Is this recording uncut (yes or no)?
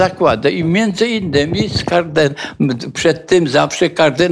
yes